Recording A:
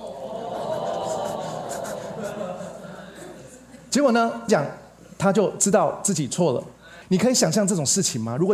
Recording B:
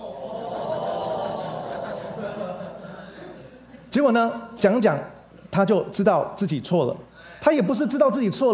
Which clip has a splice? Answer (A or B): A